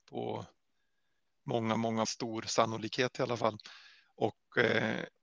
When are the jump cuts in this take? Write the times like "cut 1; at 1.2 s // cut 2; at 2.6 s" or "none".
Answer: cut 1; at 2.0 s